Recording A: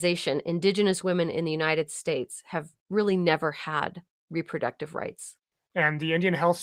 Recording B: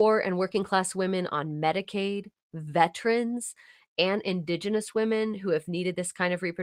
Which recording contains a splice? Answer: A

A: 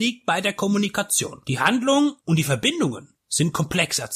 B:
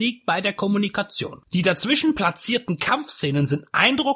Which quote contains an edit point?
B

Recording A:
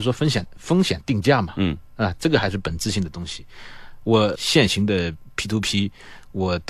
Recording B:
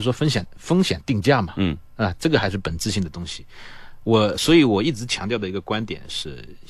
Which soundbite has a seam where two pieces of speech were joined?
A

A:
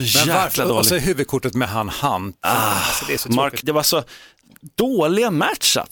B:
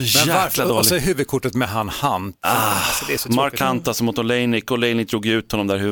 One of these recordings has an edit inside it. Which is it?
A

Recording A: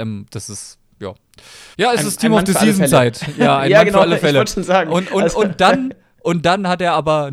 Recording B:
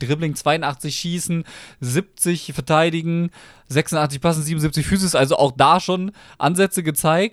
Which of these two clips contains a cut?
A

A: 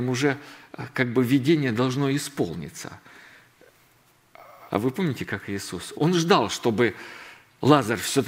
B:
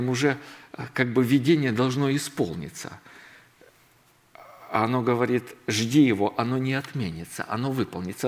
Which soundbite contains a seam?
A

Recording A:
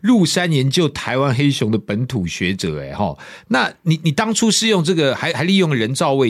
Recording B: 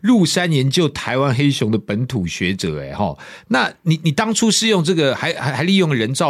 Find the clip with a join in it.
A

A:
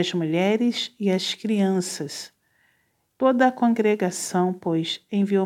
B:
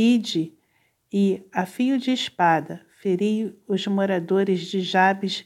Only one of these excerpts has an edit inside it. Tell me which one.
A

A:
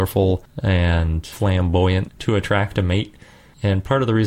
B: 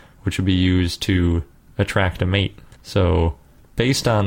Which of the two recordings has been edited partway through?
B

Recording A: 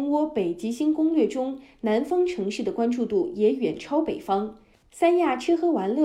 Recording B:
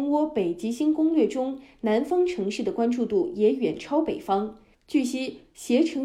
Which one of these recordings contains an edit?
B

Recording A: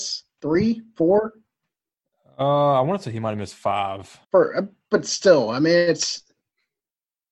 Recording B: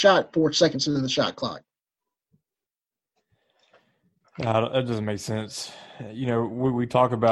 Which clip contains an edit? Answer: A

